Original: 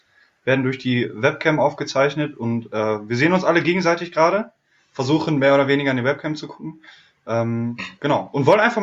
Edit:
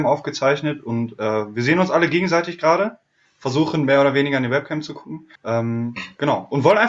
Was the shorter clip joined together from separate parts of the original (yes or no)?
yes